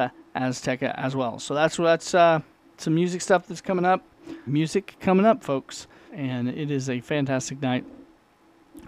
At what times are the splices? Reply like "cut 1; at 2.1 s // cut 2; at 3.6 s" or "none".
cut 1; at 4.5 s // cut 2; at 6.1 s